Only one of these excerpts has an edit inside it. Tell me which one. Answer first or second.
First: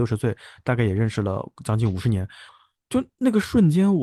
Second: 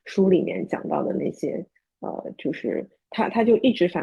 first